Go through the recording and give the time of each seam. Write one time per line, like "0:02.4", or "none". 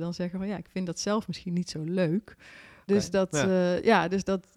0:02.9

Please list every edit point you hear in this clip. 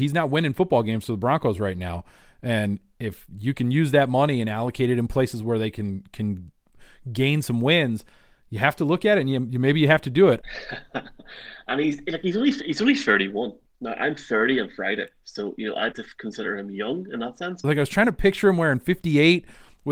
0:10.4
0:15.9
0:17.6

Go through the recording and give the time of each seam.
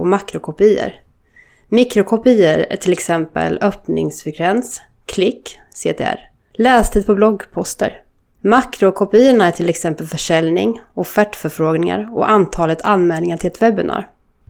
none

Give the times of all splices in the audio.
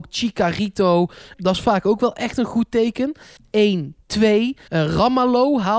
0:01.3
0:03.4
0:04.7

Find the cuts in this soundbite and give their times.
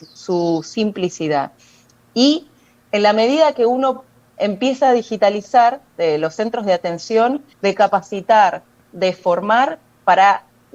0:05.9
0:07.5

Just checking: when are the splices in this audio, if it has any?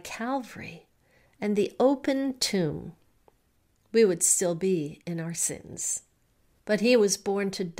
0:06.6

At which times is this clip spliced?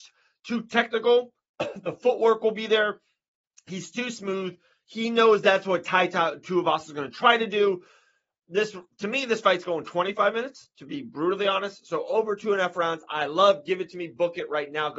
none

